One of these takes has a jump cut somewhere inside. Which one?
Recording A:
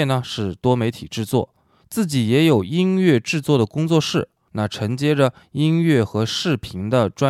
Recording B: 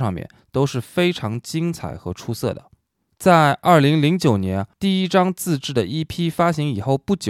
B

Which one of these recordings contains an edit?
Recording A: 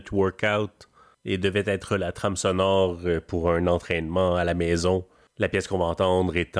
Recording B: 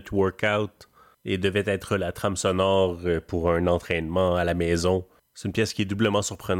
B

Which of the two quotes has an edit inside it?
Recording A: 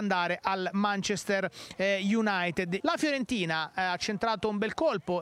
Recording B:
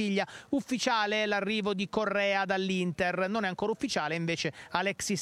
A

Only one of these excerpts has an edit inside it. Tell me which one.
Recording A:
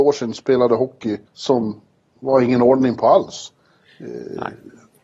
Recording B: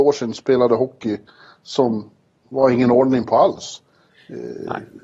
A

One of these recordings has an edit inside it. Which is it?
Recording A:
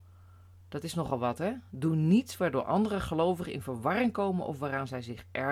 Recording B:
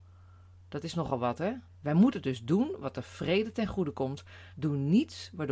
B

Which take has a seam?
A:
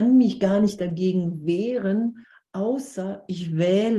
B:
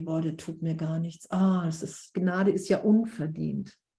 B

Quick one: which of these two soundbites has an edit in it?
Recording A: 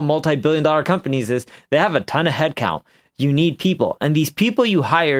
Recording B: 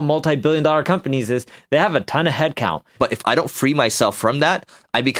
B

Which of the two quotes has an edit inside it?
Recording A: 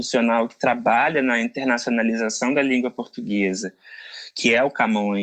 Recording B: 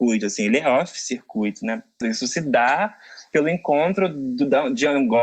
B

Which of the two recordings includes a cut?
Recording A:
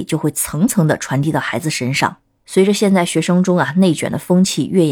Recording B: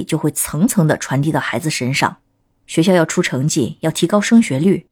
A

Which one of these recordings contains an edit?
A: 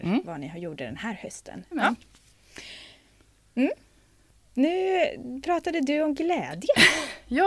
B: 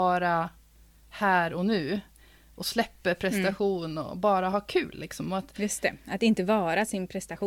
A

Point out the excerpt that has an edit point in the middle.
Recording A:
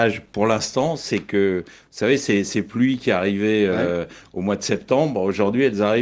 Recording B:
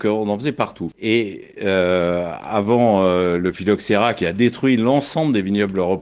B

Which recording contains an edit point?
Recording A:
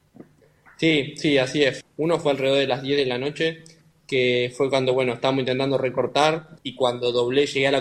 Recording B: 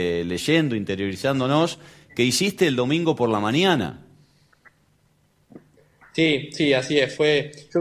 A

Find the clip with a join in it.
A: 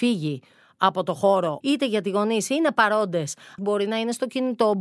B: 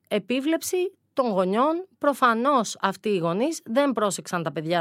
A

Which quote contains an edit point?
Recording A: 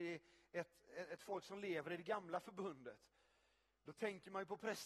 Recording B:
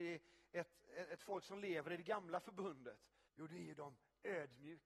B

